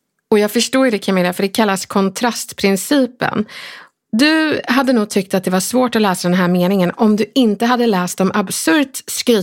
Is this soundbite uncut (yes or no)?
yes